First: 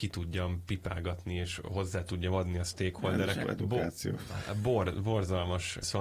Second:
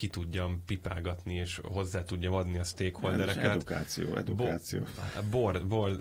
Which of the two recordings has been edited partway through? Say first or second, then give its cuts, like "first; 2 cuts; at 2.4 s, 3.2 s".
first; 2 cuts; at 3.4 s, 4.9 s